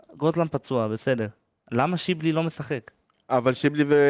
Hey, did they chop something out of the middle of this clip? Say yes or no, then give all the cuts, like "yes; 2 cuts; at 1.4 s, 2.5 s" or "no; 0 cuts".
no; 0 cuts